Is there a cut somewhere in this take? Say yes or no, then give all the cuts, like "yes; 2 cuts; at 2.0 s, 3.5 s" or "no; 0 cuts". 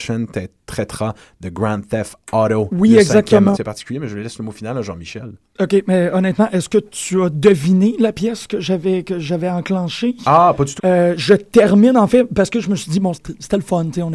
yes; 3 cuts; at 3.5 s, 10.8 s, 13.1 s